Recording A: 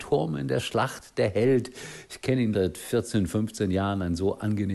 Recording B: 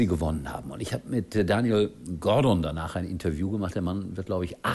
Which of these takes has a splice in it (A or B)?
A